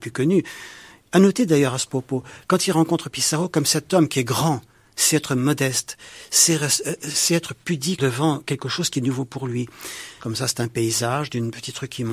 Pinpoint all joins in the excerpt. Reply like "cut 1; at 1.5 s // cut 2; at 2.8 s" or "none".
cut 1; at 8.0 s // cut 2; at 10.2 s